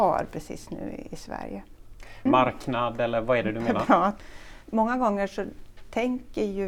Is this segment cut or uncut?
cut